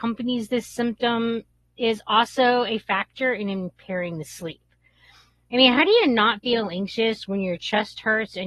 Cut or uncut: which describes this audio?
uncut